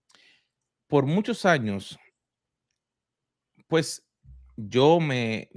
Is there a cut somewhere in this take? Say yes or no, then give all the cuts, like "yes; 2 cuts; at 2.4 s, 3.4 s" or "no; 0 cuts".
no; 0 cuts